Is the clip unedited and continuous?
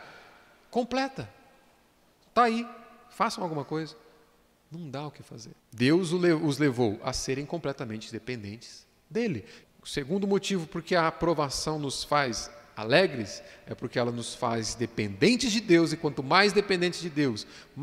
no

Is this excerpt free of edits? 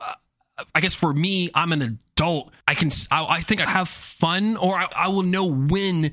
no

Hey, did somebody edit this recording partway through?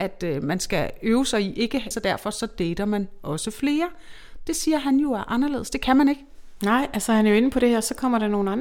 yes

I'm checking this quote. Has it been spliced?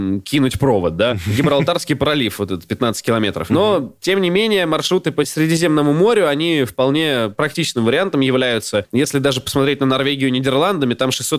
no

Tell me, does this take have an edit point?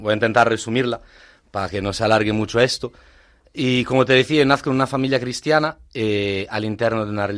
no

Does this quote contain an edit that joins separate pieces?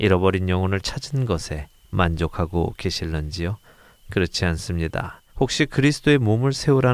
yes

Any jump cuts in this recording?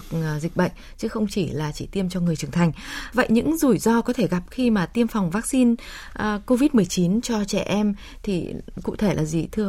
yes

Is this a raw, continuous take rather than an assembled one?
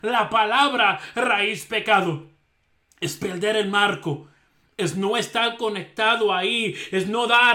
yes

